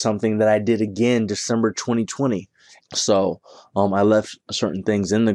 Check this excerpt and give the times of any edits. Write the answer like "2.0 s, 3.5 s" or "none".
2.8 s